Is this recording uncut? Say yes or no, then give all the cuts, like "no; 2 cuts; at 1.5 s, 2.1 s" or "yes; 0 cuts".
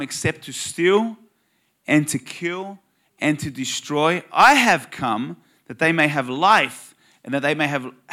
yes; 0 cuts